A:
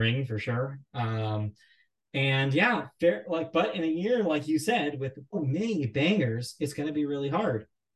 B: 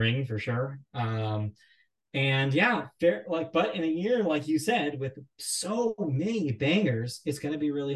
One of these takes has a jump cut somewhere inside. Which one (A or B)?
A